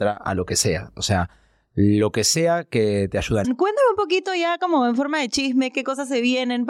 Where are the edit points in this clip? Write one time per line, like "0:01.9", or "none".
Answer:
0:03.4